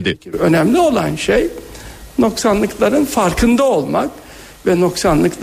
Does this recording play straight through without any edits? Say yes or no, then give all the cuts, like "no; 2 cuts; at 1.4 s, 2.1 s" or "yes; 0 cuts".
yes; 0 cuts